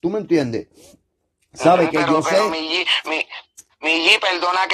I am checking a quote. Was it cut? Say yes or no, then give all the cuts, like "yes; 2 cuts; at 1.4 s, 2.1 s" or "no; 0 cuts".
no; 0 cuts